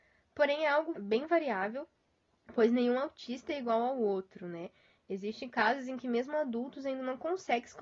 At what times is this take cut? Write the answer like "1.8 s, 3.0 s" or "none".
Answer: 0.9 s

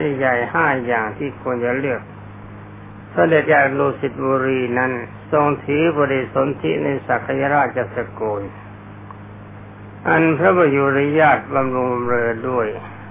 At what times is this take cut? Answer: 3.5 s

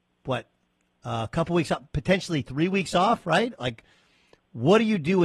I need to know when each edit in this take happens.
none

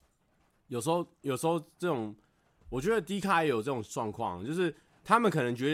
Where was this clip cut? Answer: none

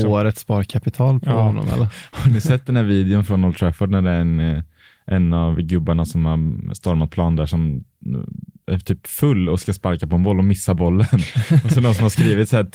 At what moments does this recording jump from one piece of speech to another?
none

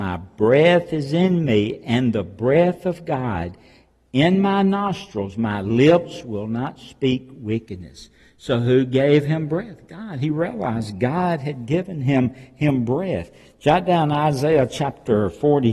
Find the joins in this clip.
none

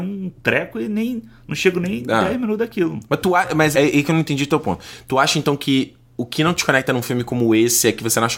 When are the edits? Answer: 3.7 s

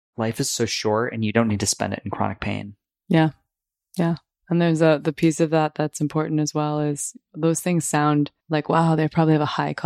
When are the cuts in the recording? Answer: 8.4 s

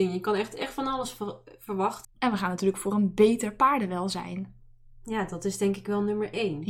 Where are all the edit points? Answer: 2.0 s

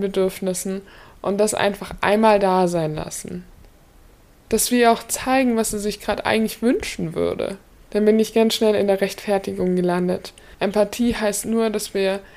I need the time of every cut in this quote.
7.9 s, 10.5 s

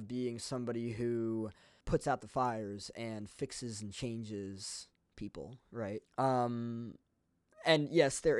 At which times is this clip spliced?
1.8 s, 6.0 s

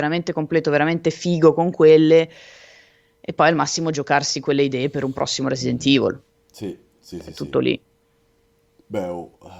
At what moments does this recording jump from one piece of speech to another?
none

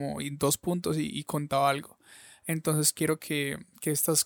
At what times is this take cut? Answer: none

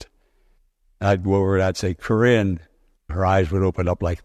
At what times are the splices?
3.1 s

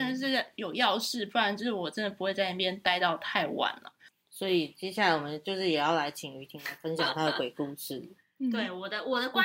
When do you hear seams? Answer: none

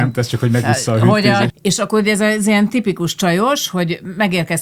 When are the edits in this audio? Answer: 1.5 s

